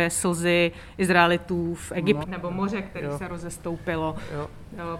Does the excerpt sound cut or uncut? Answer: cut